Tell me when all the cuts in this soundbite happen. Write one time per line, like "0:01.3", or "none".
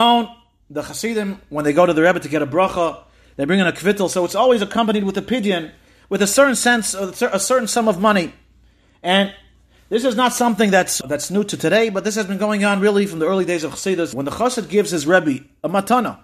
0:11.0
0:14.1